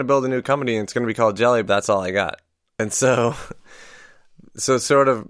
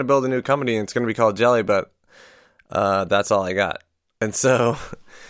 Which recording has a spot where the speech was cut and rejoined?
first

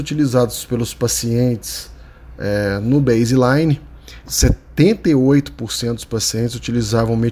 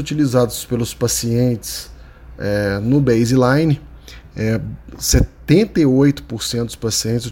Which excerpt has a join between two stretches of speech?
first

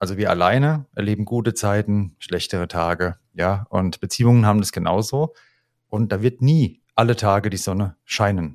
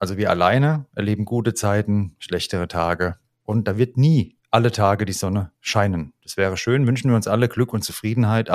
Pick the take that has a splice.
second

